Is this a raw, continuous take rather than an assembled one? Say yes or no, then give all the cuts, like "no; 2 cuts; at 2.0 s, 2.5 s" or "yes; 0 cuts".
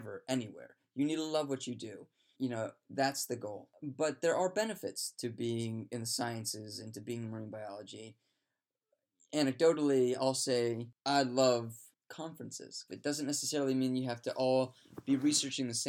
no; 2 cuts; at 2.3 s, 12.9 s